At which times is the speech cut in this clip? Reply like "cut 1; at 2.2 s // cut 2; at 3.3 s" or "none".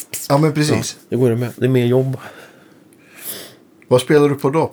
cut 1; at 1.0 s

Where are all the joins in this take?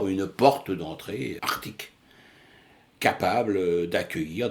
cut 1; at 1.4 s

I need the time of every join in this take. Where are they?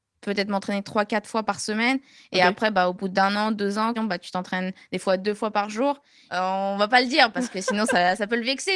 cut 1; at 3.9 s // cut 2; at 6.3 s

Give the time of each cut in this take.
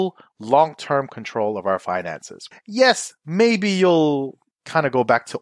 cut 1; at 2.5 s

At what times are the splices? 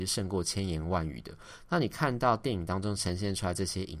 none

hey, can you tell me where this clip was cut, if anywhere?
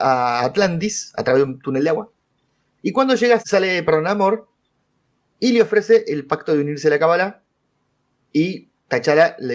cut 1; at 3.4 s

